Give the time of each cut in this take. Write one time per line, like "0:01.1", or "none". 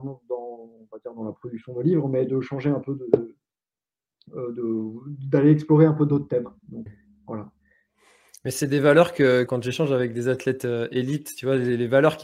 0:06.9
0:09.5